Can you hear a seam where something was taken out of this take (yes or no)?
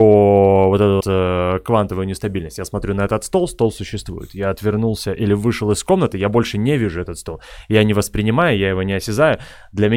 yes